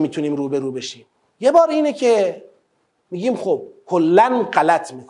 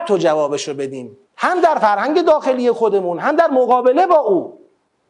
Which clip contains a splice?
second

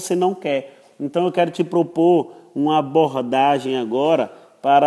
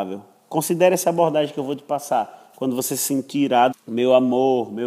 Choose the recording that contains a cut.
second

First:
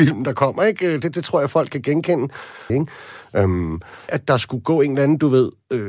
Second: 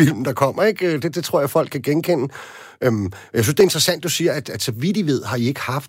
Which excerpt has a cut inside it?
first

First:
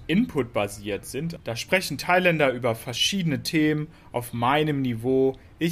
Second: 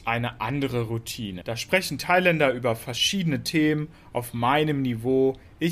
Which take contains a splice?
second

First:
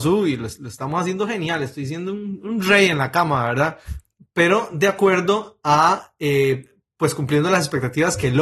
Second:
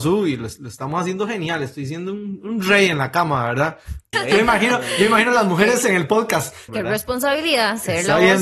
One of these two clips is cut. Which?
second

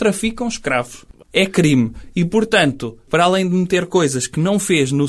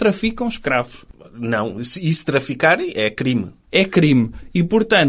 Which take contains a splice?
first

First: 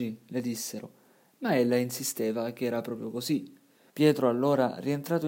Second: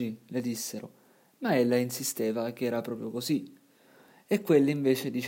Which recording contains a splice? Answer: first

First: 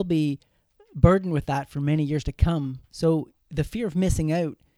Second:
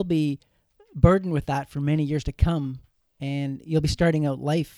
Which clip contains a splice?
first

